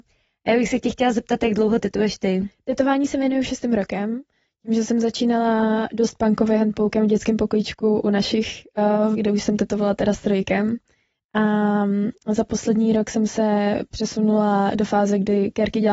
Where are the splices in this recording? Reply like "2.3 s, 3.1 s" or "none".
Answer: 9.2 s